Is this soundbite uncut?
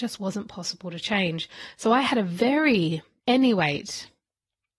no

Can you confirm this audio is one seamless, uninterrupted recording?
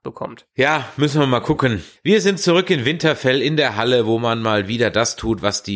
no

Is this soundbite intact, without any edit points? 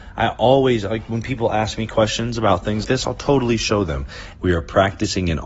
no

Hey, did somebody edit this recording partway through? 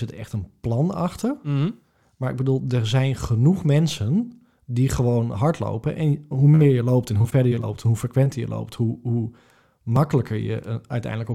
no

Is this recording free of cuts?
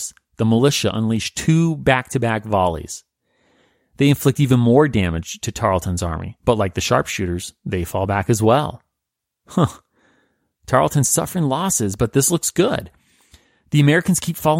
yes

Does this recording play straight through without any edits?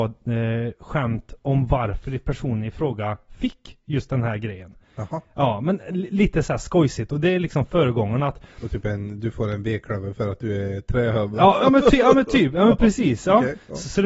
yes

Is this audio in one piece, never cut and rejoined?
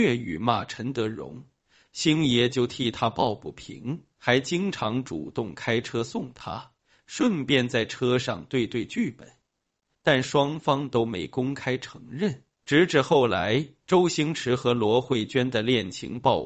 no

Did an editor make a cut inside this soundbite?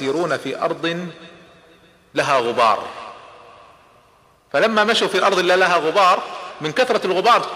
no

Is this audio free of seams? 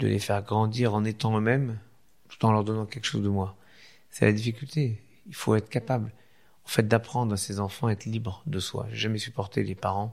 yes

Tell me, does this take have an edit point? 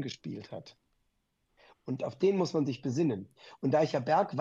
no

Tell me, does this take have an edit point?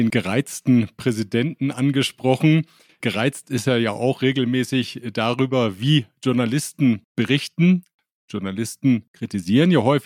no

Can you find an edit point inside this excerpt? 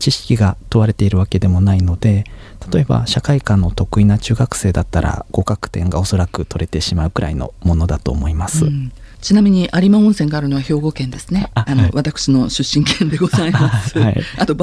yes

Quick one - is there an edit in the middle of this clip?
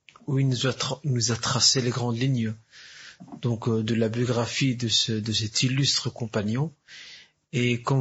no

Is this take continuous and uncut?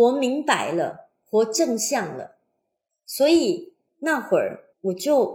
yes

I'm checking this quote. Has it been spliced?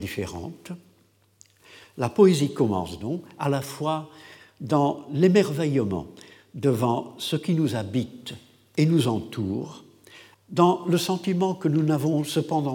yes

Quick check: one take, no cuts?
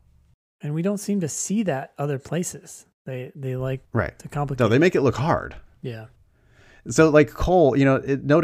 yes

